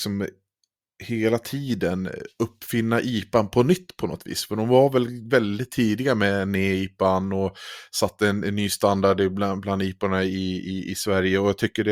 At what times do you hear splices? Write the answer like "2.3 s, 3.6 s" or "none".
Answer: none